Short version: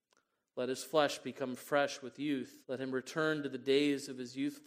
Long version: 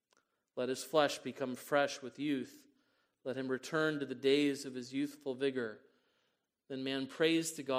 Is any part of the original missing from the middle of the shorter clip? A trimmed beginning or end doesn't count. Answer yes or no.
yes